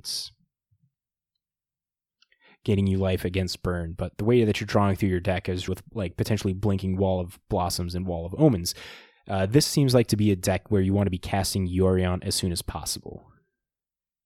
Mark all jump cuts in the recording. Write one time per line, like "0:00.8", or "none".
0:05.7